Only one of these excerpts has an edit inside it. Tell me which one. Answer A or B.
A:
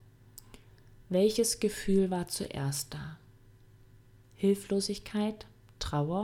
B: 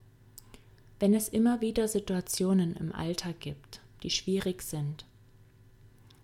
B